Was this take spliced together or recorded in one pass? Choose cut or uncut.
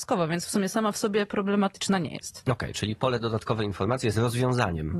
uncut